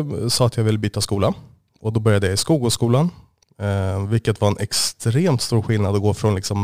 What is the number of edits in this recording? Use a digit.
0